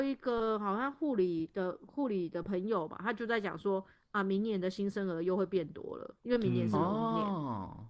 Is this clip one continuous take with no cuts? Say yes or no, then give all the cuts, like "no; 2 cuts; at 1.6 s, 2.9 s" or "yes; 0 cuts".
yes; 0 cuts